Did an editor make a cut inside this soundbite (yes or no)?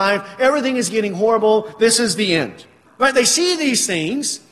yes